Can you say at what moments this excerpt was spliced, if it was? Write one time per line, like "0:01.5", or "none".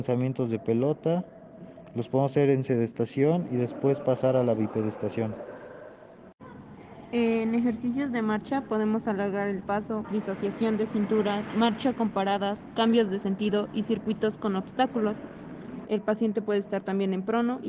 0:10.0
0:15.8